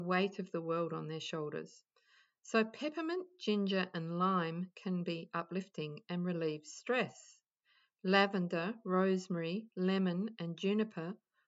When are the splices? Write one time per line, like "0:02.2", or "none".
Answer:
none

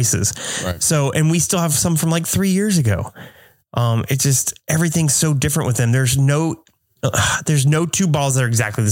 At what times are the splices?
none

